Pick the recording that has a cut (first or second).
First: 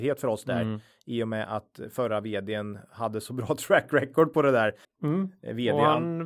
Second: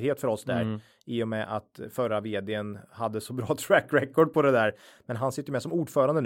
first